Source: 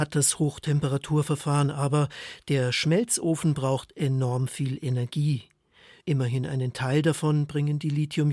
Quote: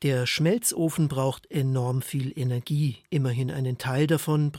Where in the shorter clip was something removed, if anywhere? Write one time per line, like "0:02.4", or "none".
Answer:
0:03.1